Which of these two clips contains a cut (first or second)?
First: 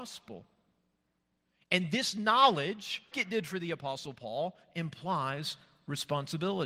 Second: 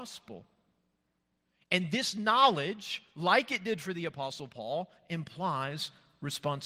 first